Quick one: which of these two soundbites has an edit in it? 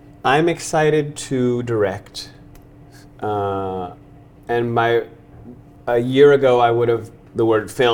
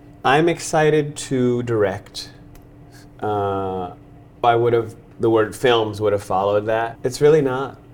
second; 2 cuts; at 4.4 s, 7.0 s

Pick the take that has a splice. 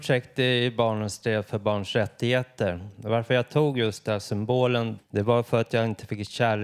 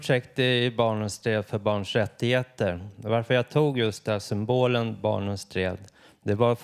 first; 1 cut; at 5.0 s

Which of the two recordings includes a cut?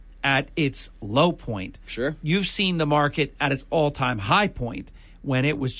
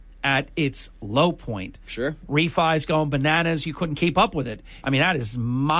second; 2 cuts; at 2.2 s, 4.8 s

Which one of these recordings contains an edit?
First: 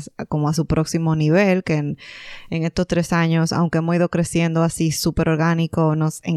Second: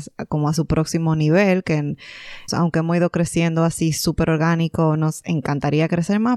second; 1 cut; at 2.5 s

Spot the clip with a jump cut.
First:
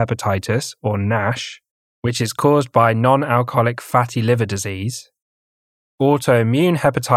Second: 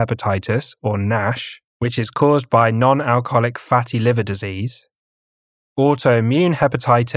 second; 1 cut; at 1.7 s

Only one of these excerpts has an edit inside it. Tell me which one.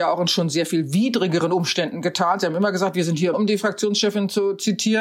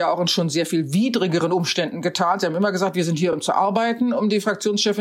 first; 1 cut; at 3.3 s

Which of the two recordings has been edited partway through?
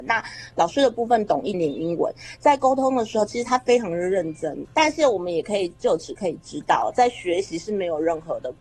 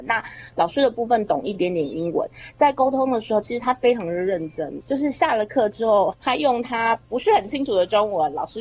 first; 2 cuts; at 1.5 s, 4.7 s

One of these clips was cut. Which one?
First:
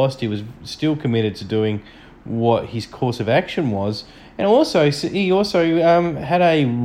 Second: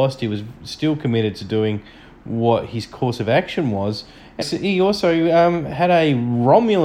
second; 1 cut; at 4.4 s

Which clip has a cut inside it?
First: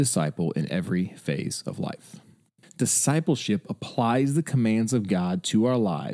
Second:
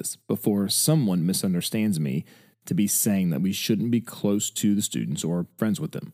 first; 1 cut; at 2.6 s

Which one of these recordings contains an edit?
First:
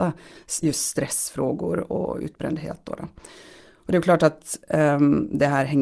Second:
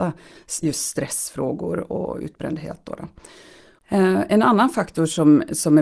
second; 1 cut; at 3.8 s

